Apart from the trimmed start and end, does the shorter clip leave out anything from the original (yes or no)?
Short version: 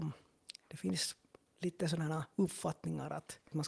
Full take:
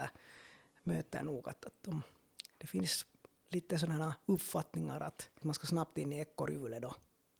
no